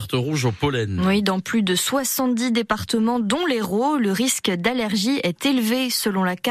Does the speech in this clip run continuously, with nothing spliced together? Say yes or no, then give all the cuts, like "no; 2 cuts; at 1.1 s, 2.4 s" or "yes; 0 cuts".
yes; 0 cuts